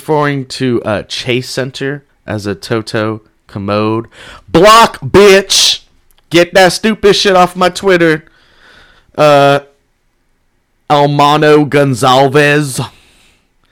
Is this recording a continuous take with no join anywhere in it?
no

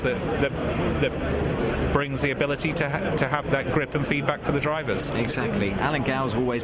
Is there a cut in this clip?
yes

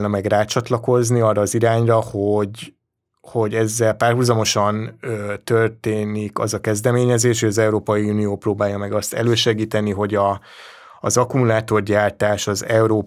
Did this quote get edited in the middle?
no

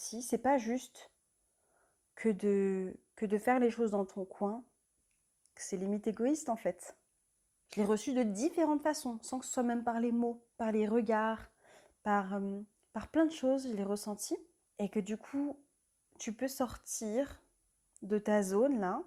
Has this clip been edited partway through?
yes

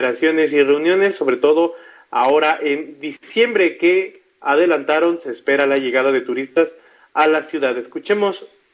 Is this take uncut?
yes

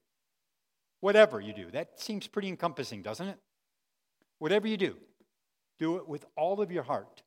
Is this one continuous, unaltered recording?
yes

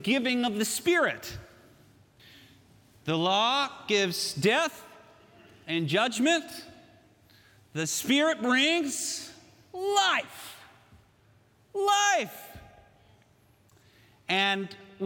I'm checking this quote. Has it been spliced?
no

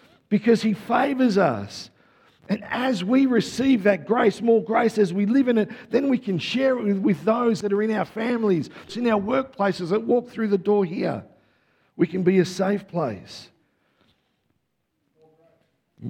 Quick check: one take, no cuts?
no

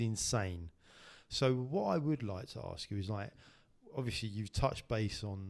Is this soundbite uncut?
yes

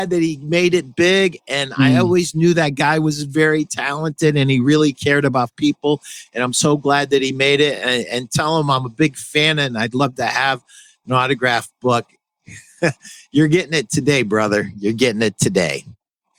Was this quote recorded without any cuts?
yes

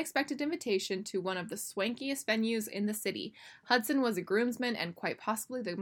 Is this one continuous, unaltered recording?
yes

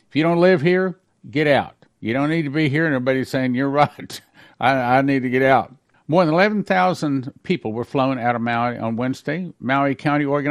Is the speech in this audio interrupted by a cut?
yes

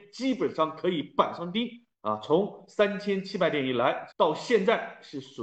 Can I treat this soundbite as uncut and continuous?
no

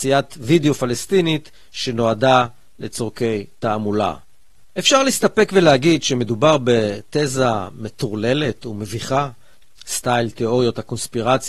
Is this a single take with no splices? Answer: no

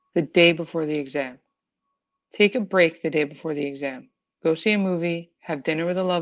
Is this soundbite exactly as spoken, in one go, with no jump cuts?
yes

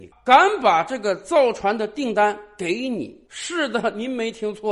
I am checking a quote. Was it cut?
yes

